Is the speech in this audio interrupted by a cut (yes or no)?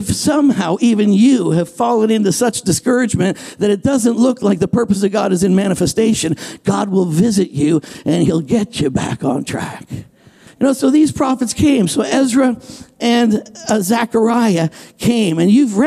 yes